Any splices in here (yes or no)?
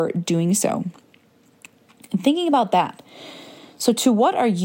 no